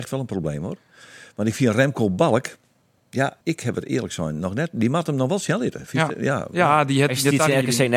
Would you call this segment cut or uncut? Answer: cut